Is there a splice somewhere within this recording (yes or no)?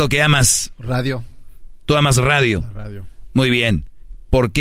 no